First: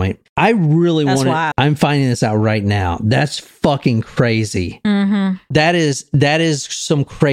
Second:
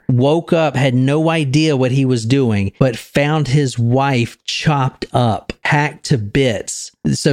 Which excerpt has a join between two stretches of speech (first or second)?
first